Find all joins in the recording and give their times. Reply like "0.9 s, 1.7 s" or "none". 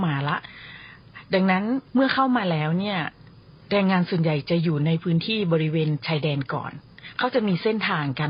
1.9 s